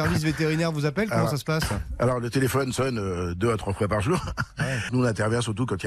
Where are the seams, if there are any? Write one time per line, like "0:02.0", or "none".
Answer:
0:04.9